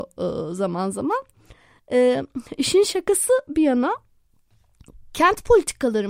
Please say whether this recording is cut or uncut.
uncut